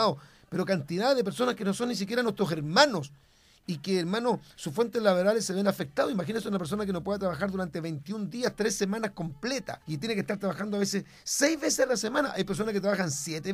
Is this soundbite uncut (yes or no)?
no